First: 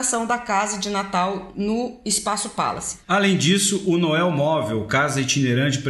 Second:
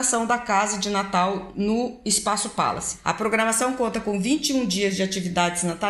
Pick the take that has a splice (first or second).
first